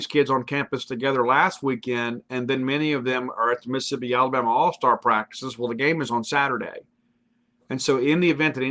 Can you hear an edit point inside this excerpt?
no; 0 cuts

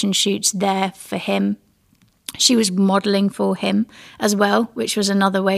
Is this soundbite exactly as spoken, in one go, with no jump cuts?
yes; 0 cuts

